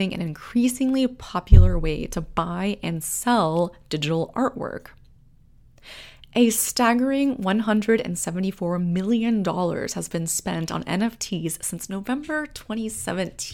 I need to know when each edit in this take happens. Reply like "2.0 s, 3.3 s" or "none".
none